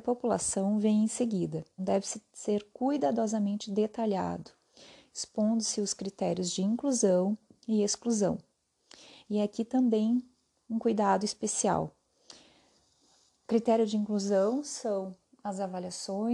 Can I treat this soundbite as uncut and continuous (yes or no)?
no